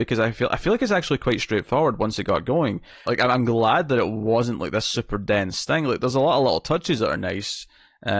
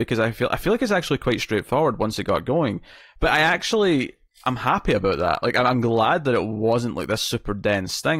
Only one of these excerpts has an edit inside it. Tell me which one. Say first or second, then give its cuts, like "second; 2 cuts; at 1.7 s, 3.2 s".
first; 1 cut; at 3.0 s